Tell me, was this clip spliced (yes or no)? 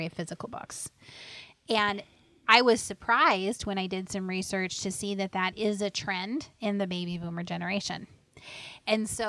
no